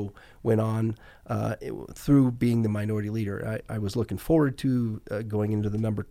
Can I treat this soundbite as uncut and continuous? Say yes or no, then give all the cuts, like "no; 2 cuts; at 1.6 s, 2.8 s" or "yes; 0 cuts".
yes; 0 cuts